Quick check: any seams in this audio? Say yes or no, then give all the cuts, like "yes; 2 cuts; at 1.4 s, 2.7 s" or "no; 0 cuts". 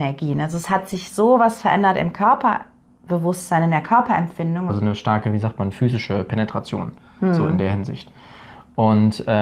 yes; 1 cut; at 4.7 s